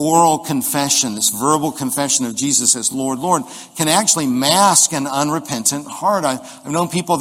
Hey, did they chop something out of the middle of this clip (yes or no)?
no